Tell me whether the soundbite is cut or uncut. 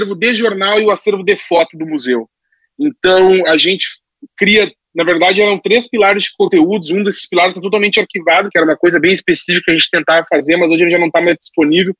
cut